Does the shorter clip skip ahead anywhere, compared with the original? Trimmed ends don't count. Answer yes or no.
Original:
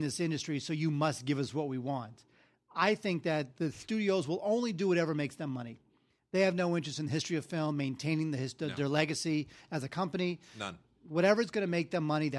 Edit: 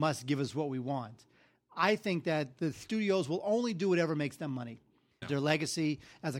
yes